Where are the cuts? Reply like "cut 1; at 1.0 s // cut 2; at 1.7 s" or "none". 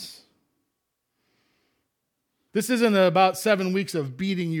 cut 1; at 2.5 s